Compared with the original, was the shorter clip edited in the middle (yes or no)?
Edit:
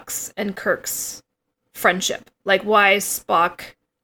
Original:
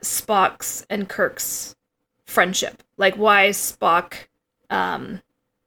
no